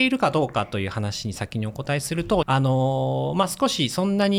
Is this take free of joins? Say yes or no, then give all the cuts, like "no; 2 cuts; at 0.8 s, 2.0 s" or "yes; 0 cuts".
no; 1 cut; at 2.4 s